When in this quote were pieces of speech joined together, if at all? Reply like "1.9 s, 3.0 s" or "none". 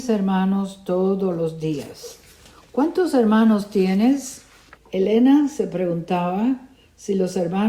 4.8 s